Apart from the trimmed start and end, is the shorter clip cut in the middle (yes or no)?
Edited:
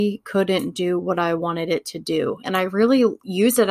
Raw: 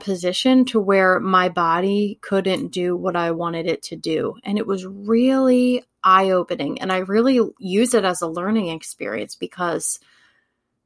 yes